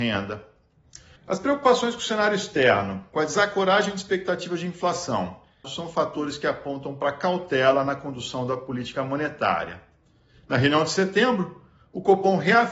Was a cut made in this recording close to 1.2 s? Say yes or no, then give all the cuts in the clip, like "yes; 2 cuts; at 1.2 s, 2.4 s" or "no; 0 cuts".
yes; 2 cuts; at 1.2 s, 5.6 s